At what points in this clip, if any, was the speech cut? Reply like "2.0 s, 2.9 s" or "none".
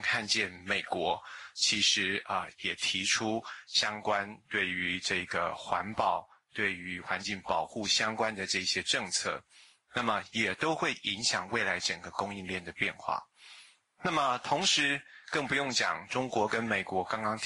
none